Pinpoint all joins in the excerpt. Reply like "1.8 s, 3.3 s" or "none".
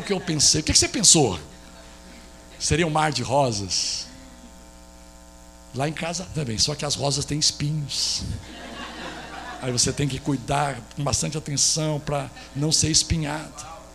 6.3 s